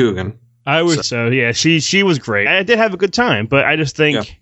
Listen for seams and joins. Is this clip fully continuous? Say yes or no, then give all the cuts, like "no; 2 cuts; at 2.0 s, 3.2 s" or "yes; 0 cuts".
no; 2 cuts; at 1.0 s, 2.5 s